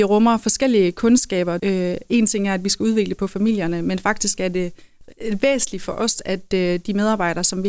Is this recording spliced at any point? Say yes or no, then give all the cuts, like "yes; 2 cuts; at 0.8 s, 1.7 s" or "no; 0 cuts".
yes; 1 cut; at 1.6 s